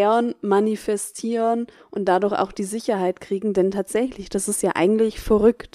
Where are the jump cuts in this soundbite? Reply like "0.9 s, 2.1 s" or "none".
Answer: 4.3 s